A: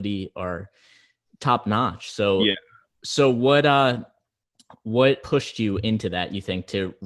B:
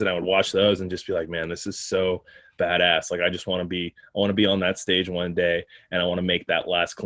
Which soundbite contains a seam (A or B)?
A